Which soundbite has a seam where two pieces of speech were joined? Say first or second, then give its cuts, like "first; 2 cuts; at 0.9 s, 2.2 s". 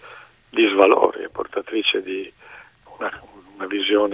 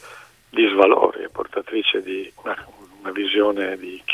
second; 1 cut; at 2.4 s